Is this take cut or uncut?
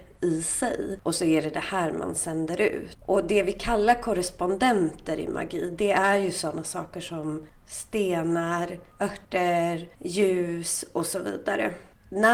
uncut